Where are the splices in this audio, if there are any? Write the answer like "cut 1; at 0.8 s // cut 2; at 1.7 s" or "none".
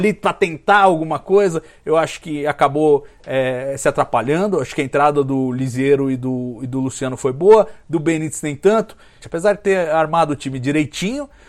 cut 1; at 9.2 s